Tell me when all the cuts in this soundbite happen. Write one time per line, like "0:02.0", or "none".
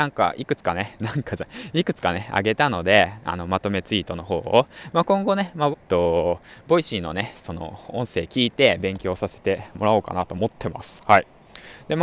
0:05.7